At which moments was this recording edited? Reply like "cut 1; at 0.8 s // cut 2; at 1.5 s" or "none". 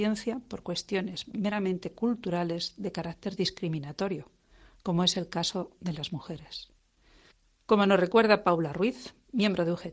none

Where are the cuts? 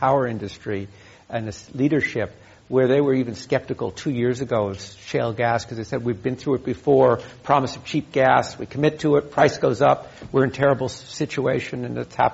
none

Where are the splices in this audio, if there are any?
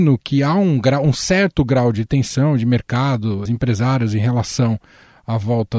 cut 1; at 3.5 s

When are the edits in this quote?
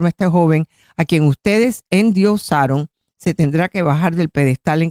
none

